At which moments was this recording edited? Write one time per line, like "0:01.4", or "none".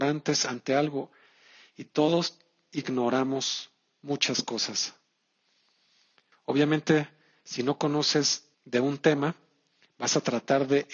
0:06.3
0:08.5